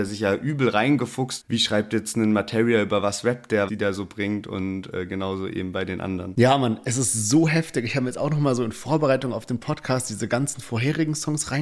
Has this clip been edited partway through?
yes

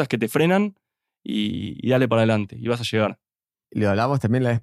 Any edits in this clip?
yes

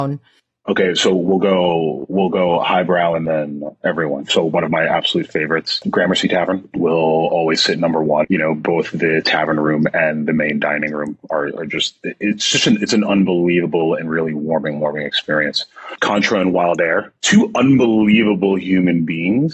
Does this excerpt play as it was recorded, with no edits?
no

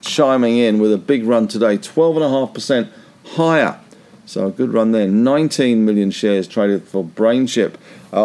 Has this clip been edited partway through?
no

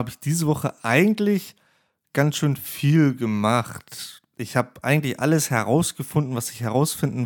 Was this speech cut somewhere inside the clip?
no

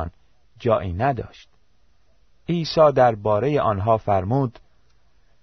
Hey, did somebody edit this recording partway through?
yes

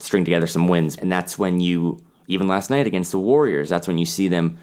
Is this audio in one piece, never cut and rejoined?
no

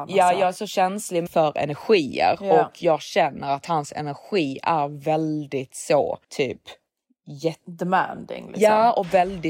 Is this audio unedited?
no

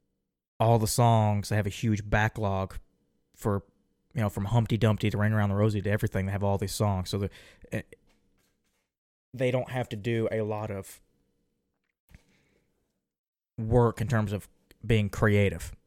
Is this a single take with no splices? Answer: yes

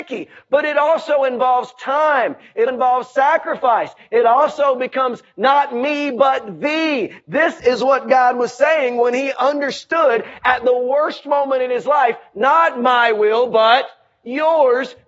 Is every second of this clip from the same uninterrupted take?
no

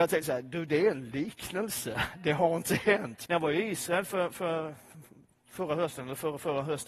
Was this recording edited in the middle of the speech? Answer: yes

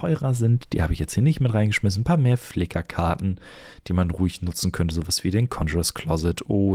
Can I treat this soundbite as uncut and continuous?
yes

